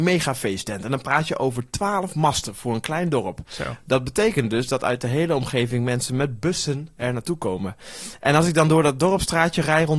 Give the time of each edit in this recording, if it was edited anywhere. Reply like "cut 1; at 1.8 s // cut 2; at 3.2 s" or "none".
none